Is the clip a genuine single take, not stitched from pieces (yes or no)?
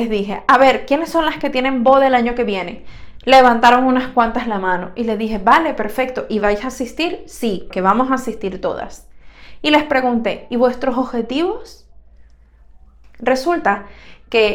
no